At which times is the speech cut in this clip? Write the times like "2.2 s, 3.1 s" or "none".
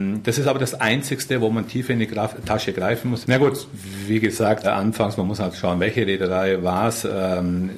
3.2 s, 4.6 s